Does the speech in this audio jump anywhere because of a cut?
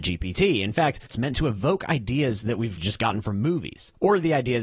yes; 2 cuts; at 1.1 s, 2.8 s

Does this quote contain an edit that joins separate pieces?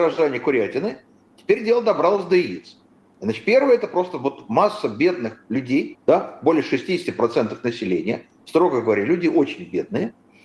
yes; 1 cut; at 5.9 s

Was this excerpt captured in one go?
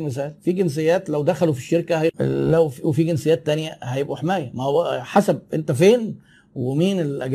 yes; 0 cuts

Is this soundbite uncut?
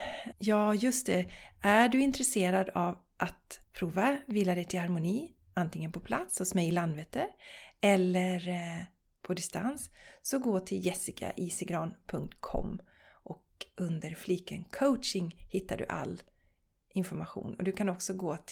no; 1 cut; at 3.6 s

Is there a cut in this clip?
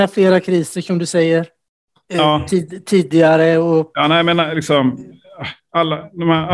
no; 0 cuts

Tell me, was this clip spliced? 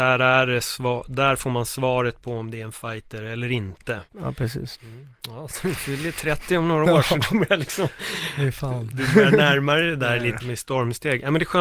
yes; 2 cuts; at 4.7 s, 10.4 s

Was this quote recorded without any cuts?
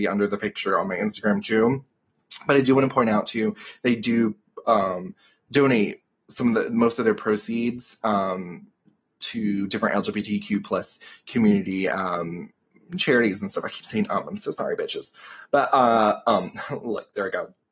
yes; 0 cuts

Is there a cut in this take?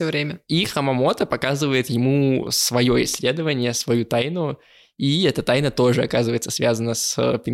no; 0 cuts

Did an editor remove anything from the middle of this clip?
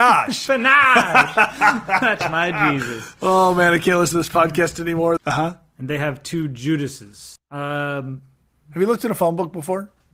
yes; 2 cuts; at 5.2 s, 7.4 s

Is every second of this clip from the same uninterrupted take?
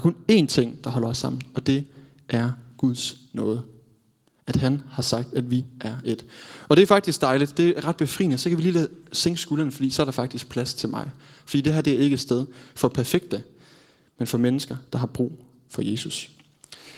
yes; 0 cuts

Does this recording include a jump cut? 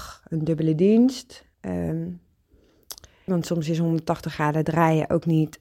yes; 2 cuts; at 1.5 s, 3.3 s

